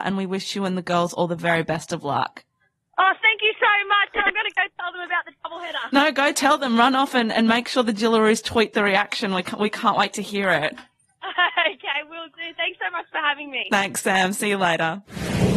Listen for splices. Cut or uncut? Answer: uncut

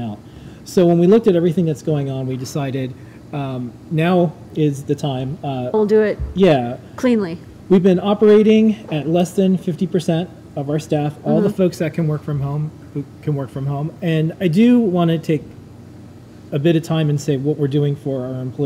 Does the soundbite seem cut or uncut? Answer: cut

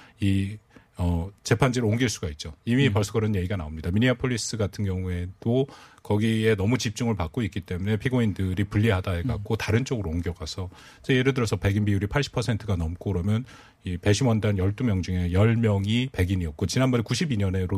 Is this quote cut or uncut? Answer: uncut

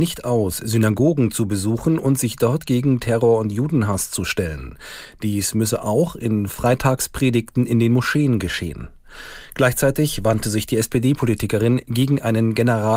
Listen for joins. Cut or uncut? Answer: uncut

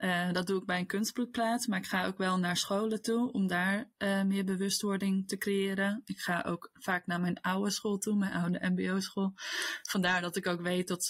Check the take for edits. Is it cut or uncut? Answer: uncut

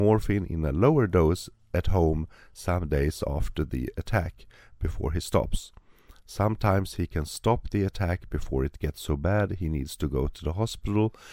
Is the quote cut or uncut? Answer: uncut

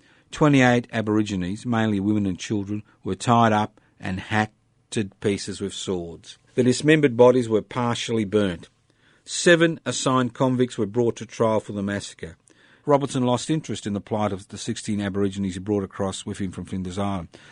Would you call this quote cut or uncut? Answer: cut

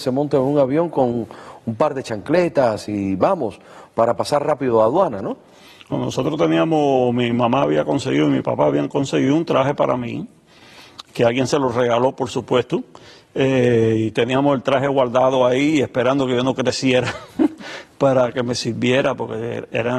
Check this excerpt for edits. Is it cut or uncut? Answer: uncut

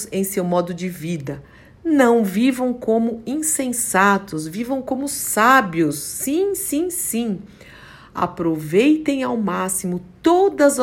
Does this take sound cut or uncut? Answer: uncut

